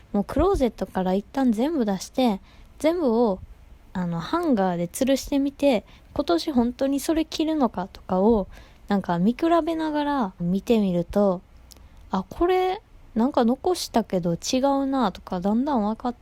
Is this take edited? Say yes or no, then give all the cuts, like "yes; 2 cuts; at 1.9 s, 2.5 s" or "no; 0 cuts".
yes; 2 cuts; at 3.8 s, 10.4 s